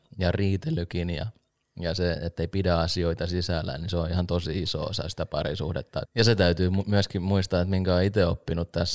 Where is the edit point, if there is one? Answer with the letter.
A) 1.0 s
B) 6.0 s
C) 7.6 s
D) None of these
B